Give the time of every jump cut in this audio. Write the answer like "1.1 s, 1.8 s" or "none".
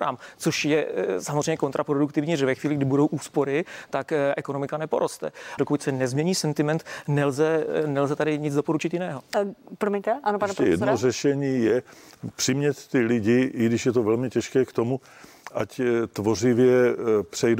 5.6 s